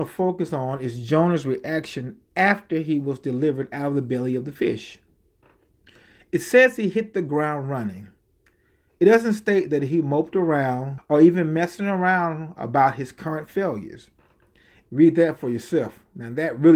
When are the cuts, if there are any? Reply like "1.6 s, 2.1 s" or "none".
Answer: 11.0 s, 14.8 s